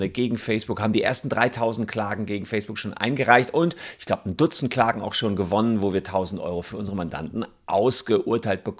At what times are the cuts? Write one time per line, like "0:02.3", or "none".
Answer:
none